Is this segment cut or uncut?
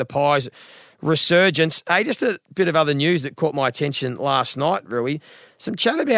uncut